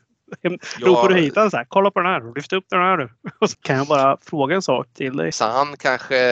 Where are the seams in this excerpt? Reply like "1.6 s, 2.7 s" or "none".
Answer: 3.5 s, 5.3 s